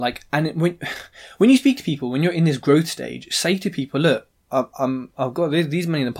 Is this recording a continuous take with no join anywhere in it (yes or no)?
yes